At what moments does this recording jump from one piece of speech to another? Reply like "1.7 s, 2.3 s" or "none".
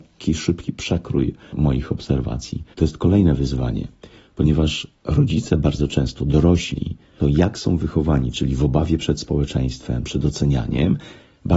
1.5 s, 2.7 s, 7.2 s